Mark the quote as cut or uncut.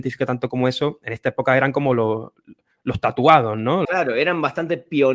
cut